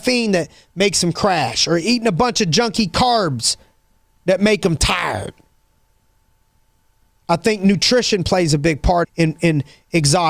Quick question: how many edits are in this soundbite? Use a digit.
2